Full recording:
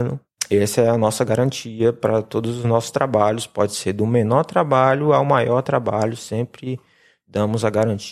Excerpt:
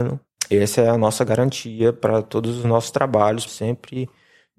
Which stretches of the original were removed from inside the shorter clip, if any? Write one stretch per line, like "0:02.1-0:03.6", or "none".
0:03.5-0:06.2

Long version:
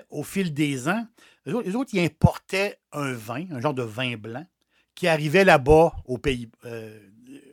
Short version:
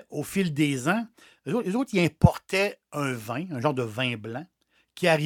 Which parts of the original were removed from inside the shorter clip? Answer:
none

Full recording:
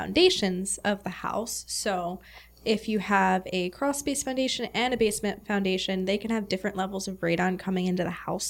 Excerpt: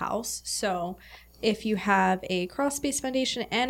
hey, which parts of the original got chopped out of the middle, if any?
none

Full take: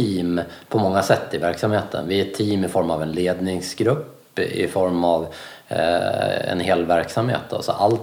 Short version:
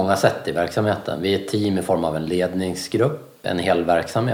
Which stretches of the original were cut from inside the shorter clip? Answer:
0:04.3-0:06.5

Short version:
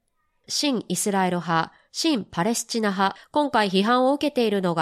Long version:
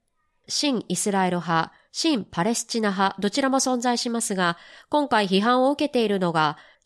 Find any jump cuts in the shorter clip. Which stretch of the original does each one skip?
0:03.2-0:04.7

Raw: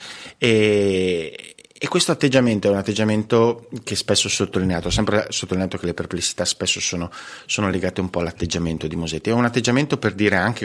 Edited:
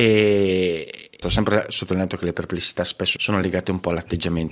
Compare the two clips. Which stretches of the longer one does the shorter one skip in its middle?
0:01.7-0:04.8
0:06.8-0:07.5

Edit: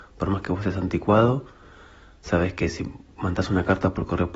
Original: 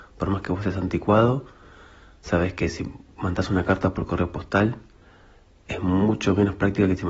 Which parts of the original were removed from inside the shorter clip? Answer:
none

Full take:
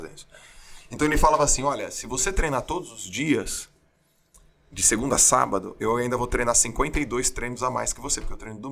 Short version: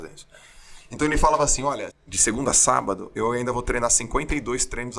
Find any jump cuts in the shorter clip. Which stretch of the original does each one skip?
0:01.9-0:04.5

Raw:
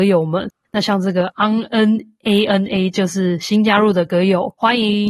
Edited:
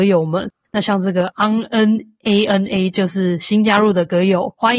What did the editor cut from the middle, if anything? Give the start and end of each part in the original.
none

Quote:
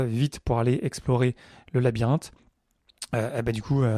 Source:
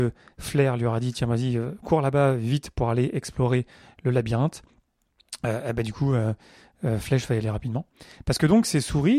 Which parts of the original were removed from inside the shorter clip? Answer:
none

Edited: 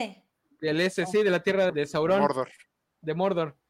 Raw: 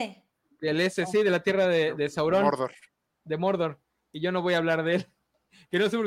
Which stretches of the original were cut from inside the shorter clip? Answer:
0:01.7-0:01.9

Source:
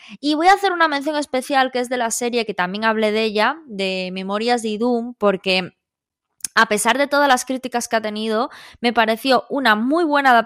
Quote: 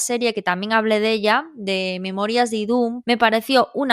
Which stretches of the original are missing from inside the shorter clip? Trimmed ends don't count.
0:05.1-0:08.8

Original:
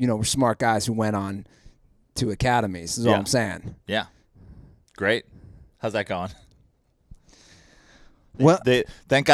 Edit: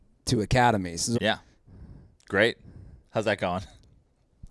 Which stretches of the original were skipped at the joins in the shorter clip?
0:03.0-0:03.8

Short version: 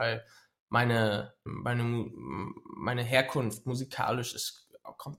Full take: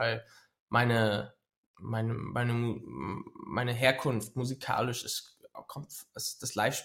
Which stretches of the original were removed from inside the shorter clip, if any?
0:01.5-0:02.2

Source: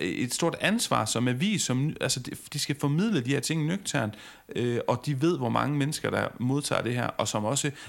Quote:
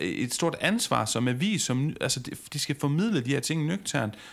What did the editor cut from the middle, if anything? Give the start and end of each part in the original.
none

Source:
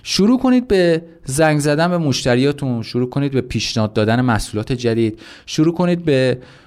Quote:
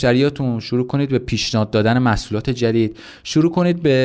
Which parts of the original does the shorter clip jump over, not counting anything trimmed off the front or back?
none

